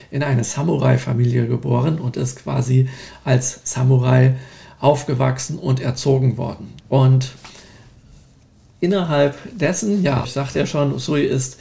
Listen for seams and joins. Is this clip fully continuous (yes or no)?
no